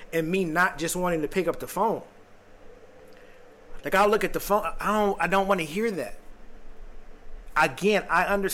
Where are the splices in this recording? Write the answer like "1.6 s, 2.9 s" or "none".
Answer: none